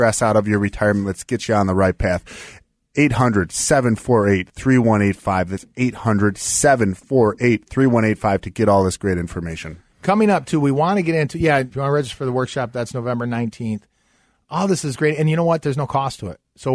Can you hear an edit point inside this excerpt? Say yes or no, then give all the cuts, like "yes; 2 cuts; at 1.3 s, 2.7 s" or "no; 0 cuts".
yes; 1 cut; at 11.7 s